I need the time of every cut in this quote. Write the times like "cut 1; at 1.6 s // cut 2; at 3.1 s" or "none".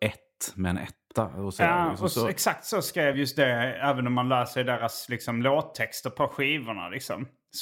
none